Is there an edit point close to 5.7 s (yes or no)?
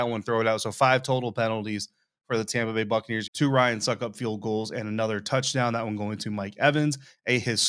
no